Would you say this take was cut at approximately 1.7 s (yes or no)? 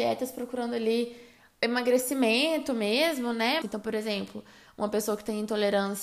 no